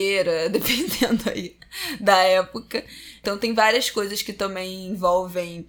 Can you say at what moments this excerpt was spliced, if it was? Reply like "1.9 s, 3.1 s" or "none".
none